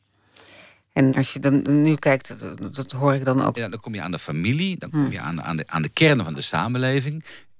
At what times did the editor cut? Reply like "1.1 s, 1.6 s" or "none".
1.1 s, 3.5 s